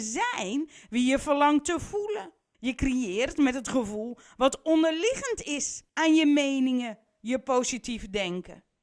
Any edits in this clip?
yes; 3 cuts; at 2.5 s, 5.9 s, 7.1 s

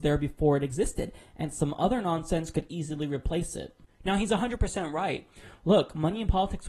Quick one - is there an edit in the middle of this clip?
no; 0 cuts

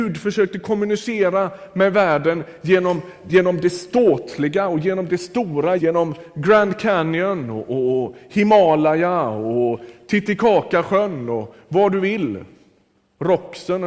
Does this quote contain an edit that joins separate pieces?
yes; 1 cut; at 5.8 s

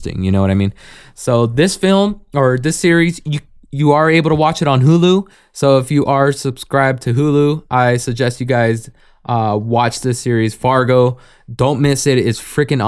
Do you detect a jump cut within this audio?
no; 0 cuts

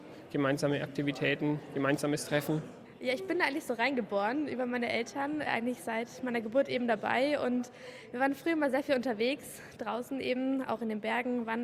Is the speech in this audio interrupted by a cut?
no; 0 cuts

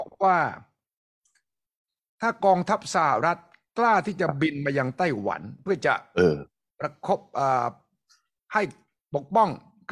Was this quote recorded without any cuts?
yes; 0 cuts

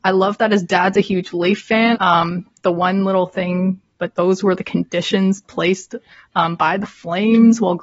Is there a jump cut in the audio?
yes; 2 cuts; at 1.9 s, 4.0 s

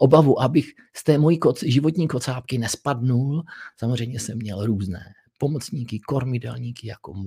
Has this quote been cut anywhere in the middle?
no; 0 cuts

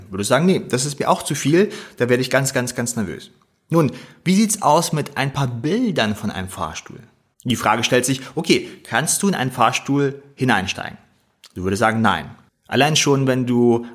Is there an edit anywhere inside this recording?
yes; 2 cuts; at 7.3 s, 12.5 s

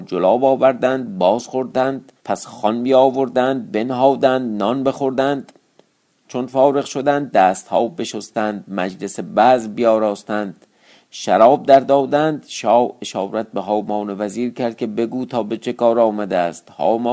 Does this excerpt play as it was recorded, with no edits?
no; 1 cut; at 2.2 s

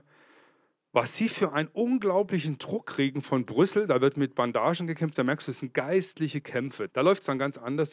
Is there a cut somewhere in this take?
yes; 1 cut; at 6.9 s

